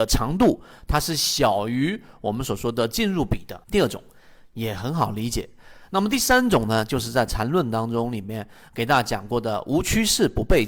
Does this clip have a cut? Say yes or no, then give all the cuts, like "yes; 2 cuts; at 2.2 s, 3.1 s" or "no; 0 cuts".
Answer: yes; 1 cut; at 3.6 s